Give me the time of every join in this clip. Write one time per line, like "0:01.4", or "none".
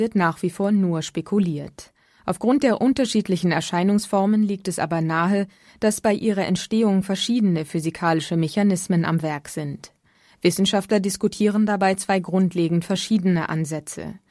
none